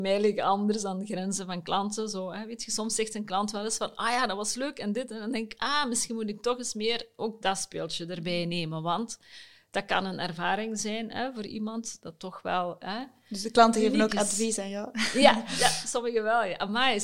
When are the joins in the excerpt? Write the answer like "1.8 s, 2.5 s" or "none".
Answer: none

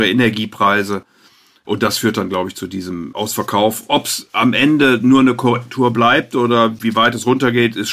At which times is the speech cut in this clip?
none

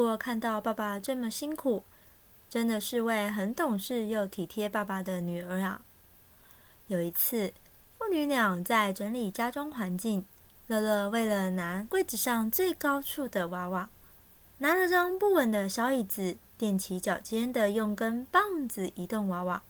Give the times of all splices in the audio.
none

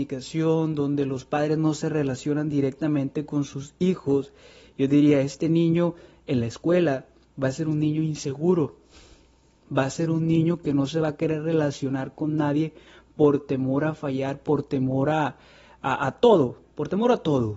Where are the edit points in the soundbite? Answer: none

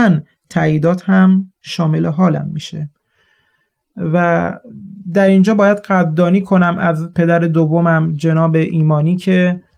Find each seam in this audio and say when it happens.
none

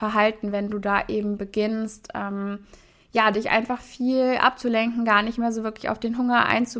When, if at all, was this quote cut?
none

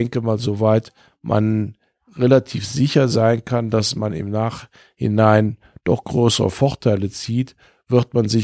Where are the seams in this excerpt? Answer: none

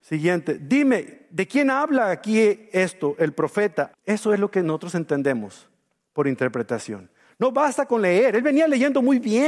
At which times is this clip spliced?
3.9 s

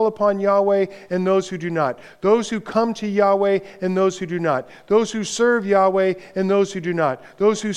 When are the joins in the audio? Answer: none

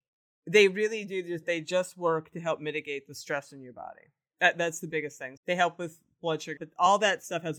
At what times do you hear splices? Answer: 5.4 s, 6.6 s

